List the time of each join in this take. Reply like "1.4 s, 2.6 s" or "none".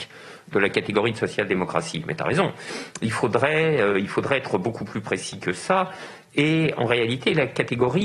none